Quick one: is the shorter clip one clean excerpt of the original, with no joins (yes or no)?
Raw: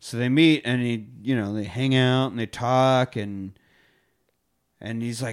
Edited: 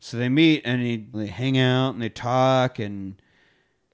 no